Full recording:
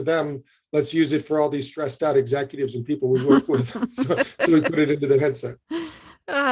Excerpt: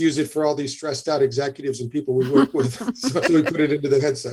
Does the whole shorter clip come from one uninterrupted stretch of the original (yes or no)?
no